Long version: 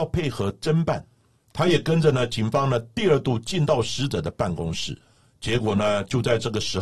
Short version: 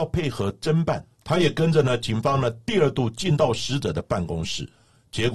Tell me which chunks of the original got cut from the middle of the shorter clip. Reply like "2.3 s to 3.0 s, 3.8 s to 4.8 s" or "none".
1.1 s to 1.4 s